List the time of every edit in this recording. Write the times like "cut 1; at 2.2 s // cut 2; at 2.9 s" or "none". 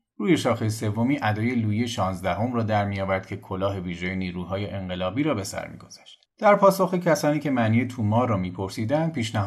cut 1; at 6.3 s

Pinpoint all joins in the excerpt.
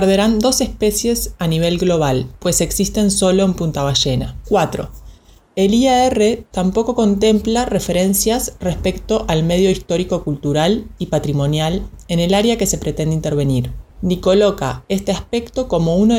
cut 1; at 4.4 s

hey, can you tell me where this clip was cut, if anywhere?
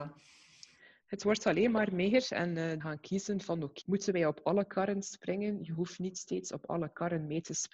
cut 1; at 2.8 s // cut 2; at 3.8 s

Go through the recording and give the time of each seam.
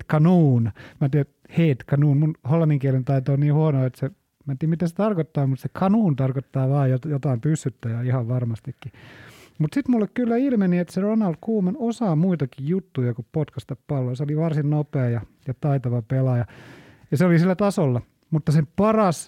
none

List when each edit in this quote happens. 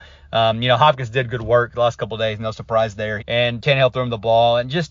cut 1; at 3.2 s

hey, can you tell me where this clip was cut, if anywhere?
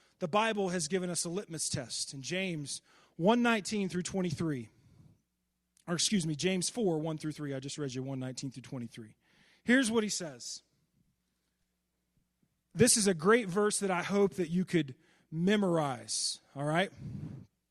none

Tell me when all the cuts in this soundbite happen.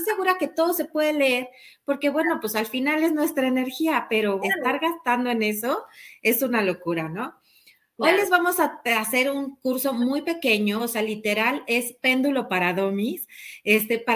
cut 1; at 4.4 s // cut 2; at 10.8 s

